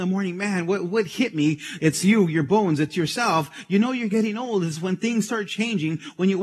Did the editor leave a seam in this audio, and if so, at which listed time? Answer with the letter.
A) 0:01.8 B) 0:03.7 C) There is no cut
A